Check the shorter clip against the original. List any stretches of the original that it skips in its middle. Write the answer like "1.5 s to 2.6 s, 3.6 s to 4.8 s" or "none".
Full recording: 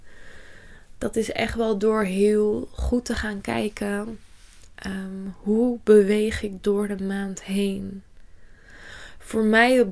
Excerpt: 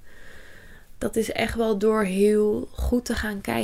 none